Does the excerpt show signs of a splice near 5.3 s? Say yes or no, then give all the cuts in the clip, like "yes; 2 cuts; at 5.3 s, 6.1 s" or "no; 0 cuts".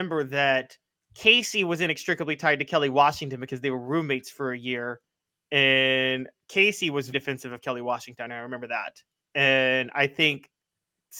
no; 1 cut; at 7.1 s